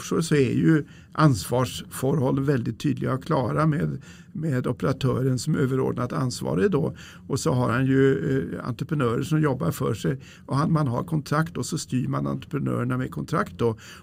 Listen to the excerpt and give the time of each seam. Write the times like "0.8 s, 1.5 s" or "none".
none